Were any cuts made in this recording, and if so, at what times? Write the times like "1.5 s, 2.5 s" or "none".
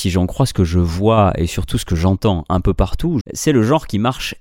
3.2 s